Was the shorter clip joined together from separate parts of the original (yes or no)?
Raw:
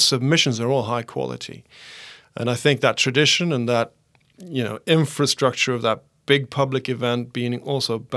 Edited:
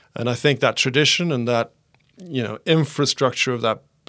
no